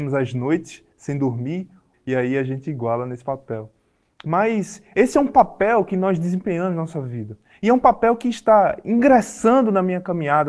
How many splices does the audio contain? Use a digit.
1